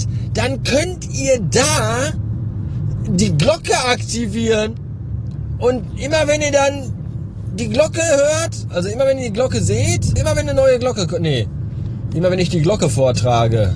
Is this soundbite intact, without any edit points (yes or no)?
no